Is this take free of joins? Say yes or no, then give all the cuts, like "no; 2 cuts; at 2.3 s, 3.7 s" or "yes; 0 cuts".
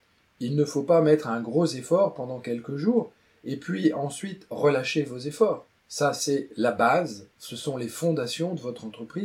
no; 1 cut; at 5.7 s